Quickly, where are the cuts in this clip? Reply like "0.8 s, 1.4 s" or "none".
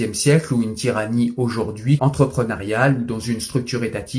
2.0 s

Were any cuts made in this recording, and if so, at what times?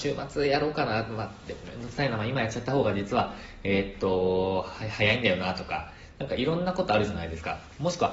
none

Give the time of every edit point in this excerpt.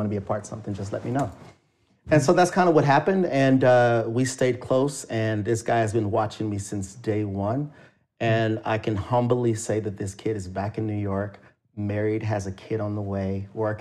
none

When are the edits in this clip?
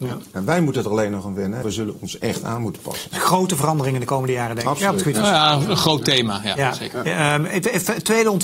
1.6 s

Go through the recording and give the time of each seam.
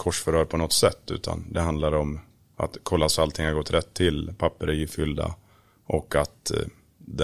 none

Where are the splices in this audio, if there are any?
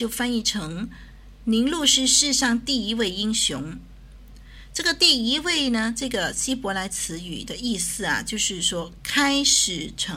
none

